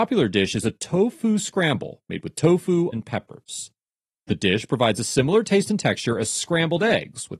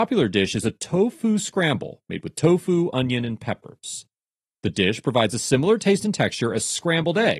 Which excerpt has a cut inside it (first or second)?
first